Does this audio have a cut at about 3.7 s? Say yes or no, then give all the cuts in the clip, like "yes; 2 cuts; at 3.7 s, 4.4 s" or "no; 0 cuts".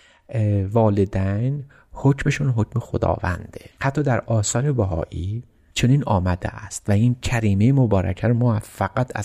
yes; 1 cut; at 3.7 s